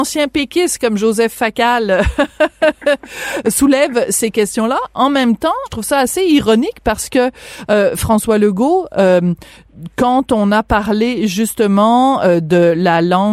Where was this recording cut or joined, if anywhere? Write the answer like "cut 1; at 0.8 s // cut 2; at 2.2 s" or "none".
cut 1; at 5.7 s